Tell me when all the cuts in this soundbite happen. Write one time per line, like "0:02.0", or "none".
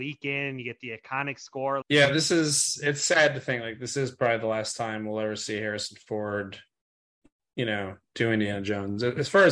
0:01.8